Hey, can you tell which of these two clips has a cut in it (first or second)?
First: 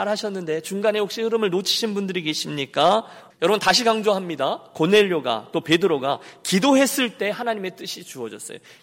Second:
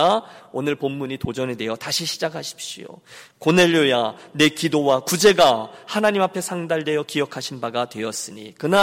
first